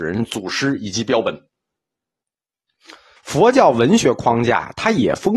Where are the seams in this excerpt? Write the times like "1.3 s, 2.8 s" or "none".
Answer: 3.2 s